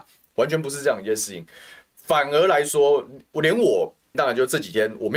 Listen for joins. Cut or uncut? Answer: cut